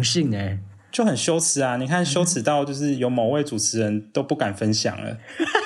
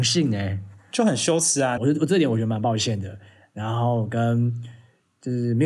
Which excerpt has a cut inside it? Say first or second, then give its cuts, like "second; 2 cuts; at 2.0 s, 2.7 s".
second; 1 cut; at 1.8 s